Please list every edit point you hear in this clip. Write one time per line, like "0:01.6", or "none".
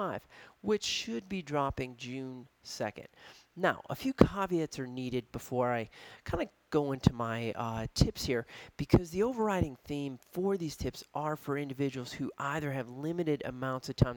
none